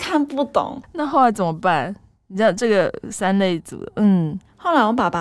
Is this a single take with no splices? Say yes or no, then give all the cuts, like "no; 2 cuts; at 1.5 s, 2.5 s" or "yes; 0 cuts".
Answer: yes; 0 cuts